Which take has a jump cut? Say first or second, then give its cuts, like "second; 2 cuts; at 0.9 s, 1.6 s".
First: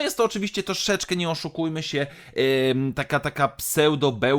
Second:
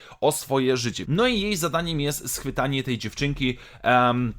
second; 1 cut; at 1.0 s